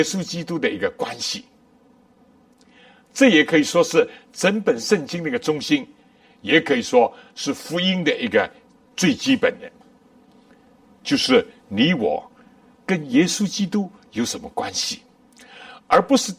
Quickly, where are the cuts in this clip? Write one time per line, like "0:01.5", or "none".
none